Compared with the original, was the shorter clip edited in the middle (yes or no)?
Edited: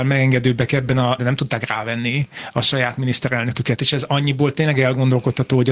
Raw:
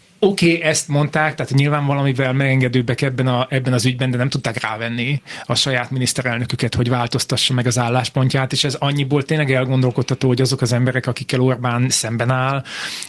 yes